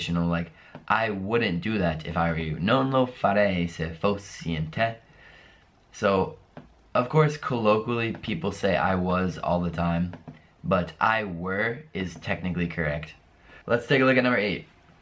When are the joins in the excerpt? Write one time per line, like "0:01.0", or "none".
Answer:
0:13.6